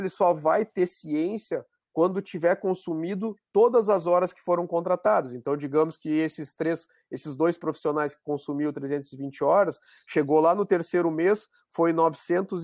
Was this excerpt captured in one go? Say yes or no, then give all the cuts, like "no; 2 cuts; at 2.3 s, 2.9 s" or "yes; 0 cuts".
yes; 0 cuts